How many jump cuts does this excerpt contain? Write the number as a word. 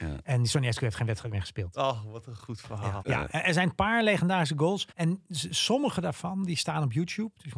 two